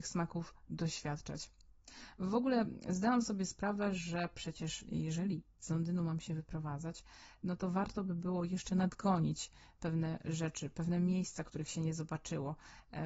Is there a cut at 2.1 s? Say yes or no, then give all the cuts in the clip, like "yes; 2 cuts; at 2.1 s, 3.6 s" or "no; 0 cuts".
no; 0 cuts